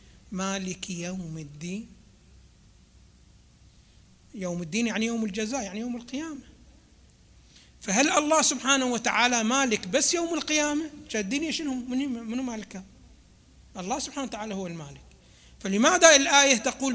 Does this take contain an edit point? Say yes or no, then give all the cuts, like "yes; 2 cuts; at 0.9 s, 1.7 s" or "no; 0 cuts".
no; 0 cuts